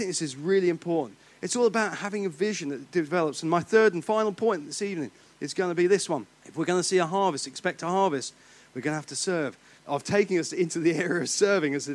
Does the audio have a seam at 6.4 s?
yes; 2 cuts; at 6.4 s, 9.8 s

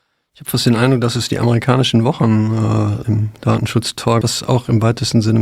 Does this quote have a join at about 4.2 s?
yes; 2 cuts; at 3.0 s, 4.2 s

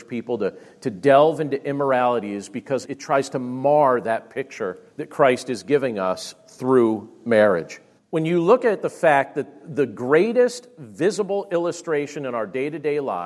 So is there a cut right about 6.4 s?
no; 3 cuts; at 2.8 s, 4.9 s, 8.0 s

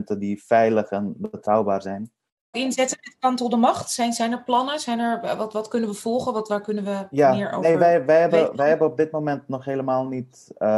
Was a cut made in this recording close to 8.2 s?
no; 1 cut; at 2.5 s

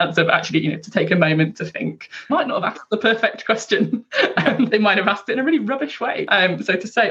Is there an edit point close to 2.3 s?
yes; 2 cuts; at 2.3 s, 4.7 s

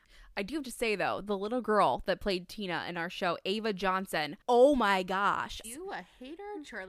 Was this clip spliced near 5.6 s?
yes; 2 cuts; at 4.4 s, 5.6 s

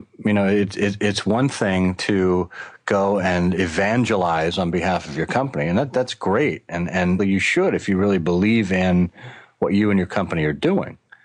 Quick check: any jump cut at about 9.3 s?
no; 1 cut; at 7.2 s

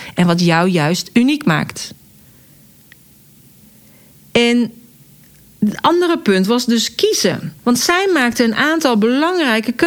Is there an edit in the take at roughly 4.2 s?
no; 1 cut; at 7.6 s

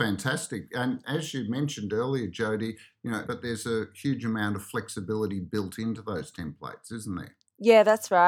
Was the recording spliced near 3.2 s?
yes; 1 cut; at 3.2 s

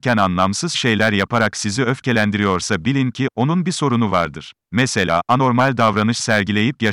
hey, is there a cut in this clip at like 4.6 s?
yes; 1 cut; at 4.6 s

